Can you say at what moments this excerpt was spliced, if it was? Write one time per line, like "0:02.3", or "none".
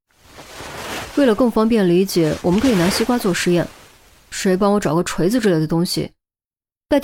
none